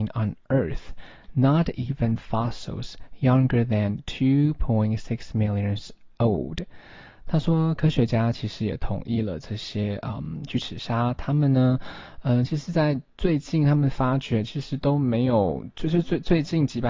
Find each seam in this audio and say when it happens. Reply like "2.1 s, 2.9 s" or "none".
none

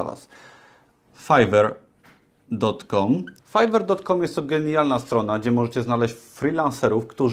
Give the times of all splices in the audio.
1.1 s, 3.4 s

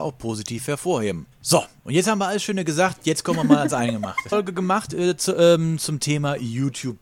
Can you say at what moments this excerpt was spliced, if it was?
1.3 s, 4.3 s

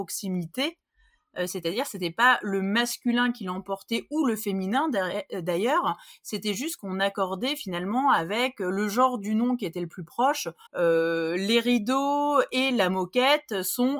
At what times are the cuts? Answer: 10.7 s

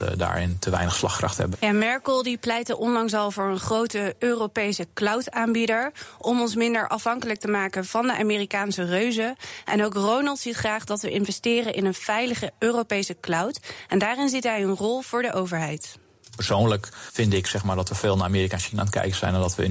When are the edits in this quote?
1.5 s

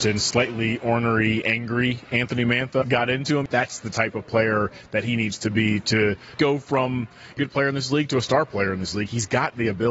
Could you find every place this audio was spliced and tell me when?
2.8 s, 7.4 s

